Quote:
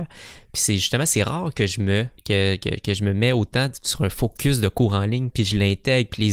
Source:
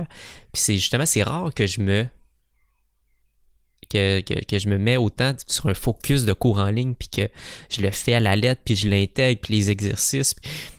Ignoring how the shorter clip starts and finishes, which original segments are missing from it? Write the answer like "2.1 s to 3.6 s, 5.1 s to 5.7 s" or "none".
2.2 s to 3.8 s, 7.0 s to 8.6 s